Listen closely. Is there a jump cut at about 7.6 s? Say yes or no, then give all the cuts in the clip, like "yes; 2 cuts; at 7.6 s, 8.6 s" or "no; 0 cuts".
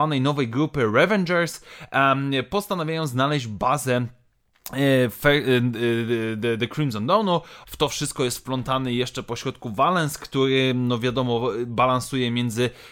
yes; 1 cut; at 7.6 s